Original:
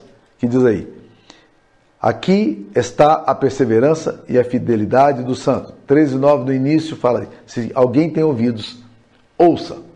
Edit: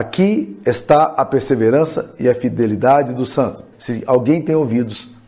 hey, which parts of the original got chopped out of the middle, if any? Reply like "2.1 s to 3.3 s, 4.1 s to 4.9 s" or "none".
5.8 s to 7.4 s